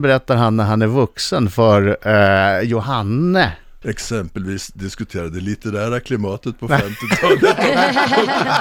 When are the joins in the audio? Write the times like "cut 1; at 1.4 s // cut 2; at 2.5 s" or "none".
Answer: cut 1; at 3.8 s